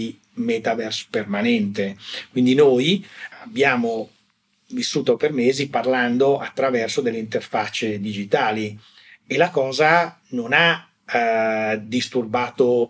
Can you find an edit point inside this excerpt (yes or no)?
no